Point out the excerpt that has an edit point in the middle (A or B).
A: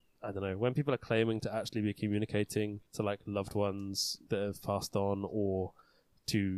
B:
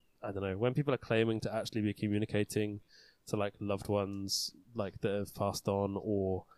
A